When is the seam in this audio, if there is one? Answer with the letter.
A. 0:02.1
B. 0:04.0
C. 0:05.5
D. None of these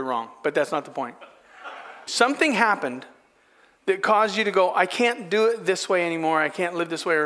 A